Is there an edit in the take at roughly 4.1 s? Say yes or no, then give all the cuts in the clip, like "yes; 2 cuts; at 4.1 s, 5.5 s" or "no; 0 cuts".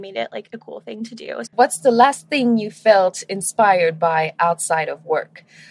no; 1 cut; at 1.5 s